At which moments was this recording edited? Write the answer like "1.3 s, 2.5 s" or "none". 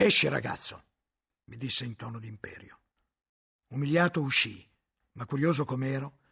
none